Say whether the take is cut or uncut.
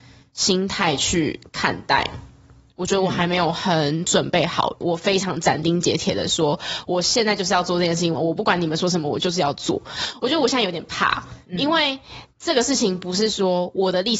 cut